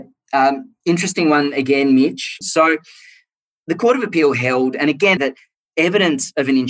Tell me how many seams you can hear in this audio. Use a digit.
2